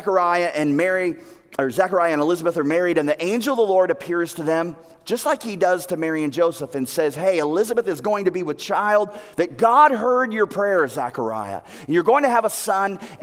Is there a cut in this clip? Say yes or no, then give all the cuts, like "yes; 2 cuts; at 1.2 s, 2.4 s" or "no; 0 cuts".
no; 0 cuts